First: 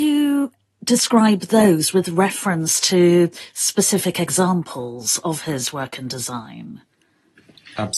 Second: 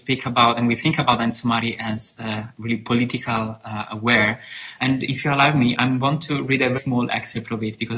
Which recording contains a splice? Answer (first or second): second